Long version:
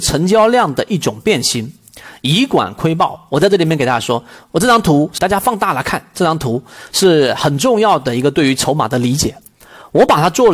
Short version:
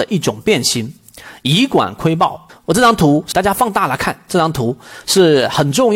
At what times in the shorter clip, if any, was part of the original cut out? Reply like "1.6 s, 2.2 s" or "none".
2.5 s